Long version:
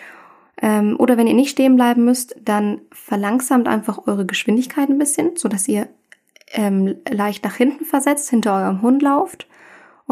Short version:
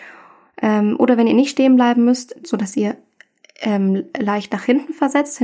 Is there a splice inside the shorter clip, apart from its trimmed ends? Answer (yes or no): yes